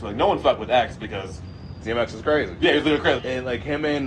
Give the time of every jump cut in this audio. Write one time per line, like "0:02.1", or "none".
0:03.2

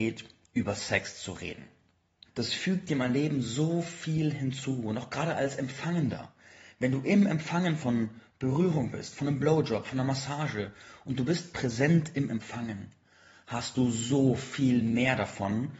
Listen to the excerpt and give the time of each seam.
0:02.2

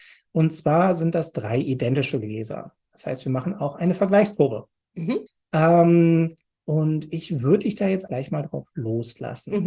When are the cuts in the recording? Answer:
0:05.3
0:08.1

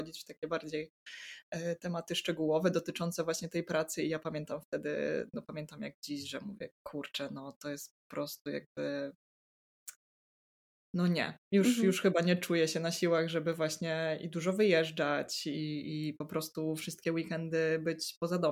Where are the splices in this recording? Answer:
none

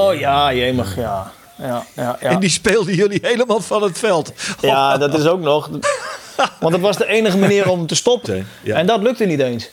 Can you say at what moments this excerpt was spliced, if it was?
0:05.8
0:08.2

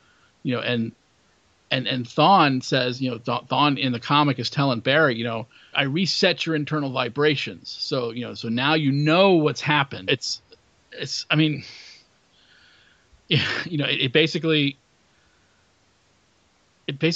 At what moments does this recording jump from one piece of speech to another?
0:05.7
0:10.1

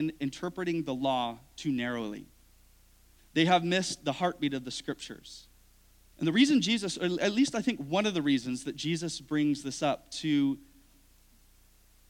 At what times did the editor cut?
0:03.2
0:06.1

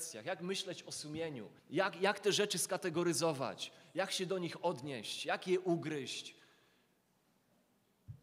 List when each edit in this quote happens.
0:01.6

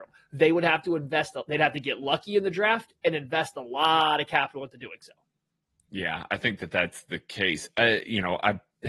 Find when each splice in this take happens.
none

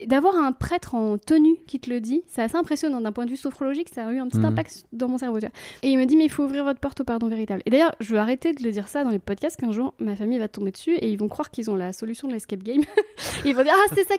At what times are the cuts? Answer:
0:05.8

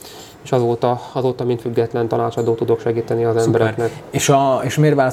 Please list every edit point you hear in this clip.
none

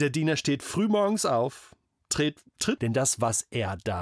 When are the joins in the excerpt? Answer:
0:02.8

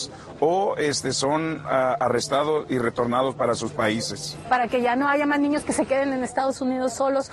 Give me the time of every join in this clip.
0:04.4

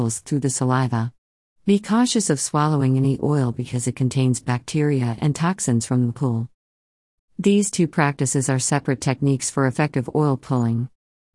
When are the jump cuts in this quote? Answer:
0:01.5
0:07.2

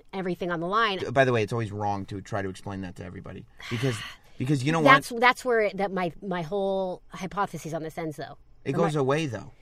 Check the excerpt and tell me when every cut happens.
0:01.0
0:07.1

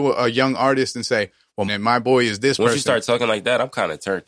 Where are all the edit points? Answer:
0:01.7

